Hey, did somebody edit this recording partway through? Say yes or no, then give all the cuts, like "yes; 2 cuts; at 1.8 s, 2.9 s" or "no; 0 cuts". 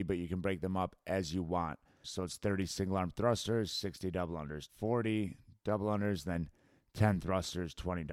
yes; 2 cuts; at 2.0 s, 4.7 s